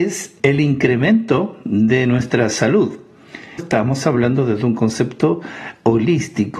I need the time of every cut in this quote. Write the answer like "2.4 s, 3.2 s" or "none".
3.6 s